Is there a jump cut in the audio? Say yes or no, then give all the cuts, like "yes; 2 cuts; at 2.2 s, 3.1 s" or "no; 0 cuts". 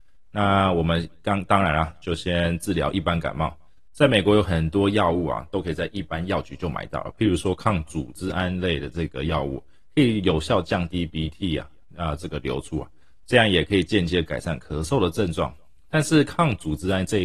no; 0 cuts